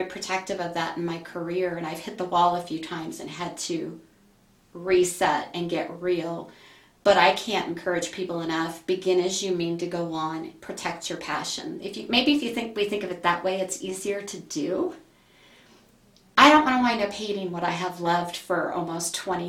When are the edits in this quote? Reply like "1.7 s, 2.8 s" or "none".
none